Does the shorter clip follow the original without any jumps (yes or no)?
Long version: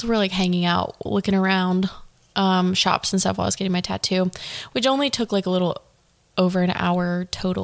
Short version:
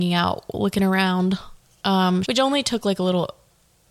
no